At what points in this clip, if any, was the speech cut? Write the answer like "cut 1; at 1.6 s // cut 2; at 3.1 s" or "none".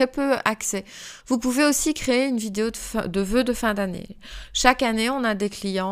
cut 1; at 1.2 s